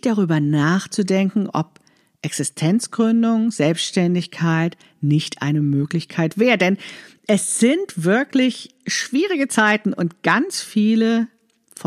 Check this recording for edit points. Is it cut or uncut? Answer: uncut